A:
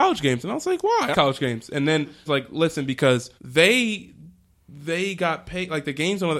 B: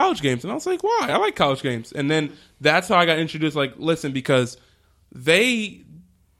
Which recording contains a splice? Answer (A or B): A